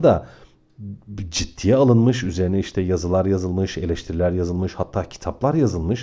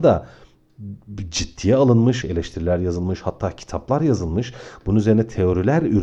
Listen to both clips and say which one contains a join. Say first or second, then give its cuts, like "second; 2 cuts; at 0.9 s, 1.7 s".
second; 1 cut; at 2.2 s